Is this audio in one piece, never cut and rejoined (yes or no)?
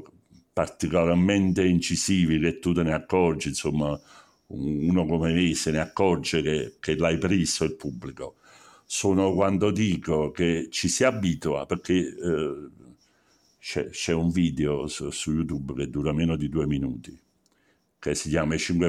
yes